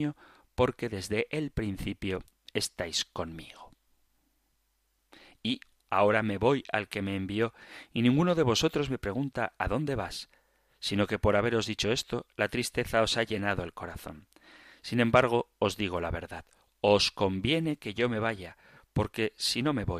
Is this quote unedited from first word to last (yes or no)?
no